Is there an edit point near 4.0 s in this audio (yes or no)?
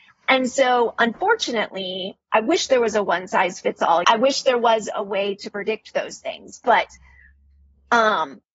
yes